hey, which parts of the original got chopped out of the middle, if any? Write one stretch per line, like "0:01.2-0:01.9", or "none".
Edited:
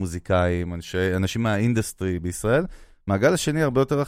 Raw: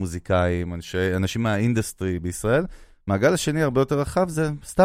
none